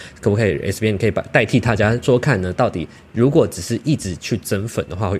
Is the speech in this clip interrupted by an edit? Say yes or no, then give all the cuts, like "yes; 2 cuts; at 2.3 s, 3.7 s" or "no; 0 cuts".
yes; 1 cut; at 2.0 s